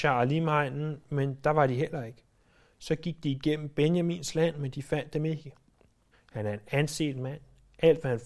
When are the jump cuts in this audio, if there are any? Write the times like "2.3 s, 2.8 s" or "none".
6.1 s